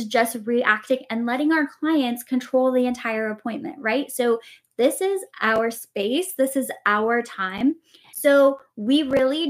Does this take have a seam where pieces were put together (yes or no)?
yes